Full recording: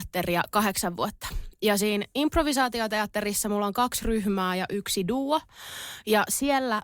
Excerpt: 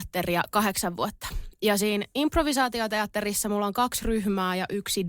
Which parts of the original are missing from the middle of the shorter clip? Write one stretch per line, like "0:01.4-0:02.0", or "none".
none